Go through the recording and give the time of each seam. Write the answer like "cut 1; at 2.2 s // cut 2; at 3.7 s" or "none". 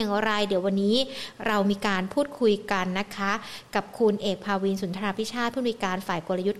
none